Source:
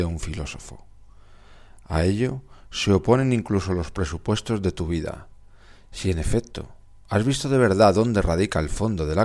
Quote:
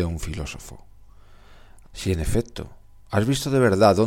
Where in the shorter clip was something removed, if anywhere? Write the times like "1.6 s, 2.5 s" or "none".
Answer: 1.8 s